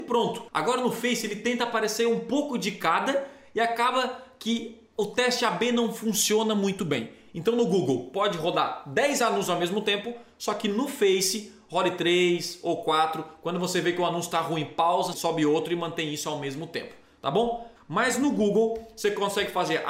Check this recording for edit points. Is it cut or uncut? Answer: cut